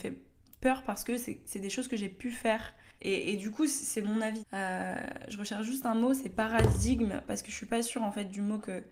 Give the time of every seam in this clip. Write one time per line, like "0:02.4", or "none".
0:03.0
0:04.4